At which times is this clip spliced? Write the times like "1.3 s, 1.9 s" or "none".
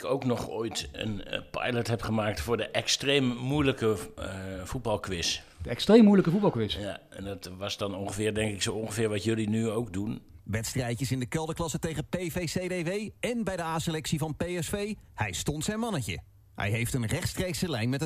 10.4 s